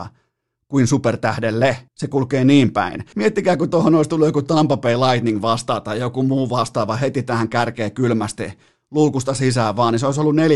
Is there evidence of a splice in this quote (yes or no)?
yes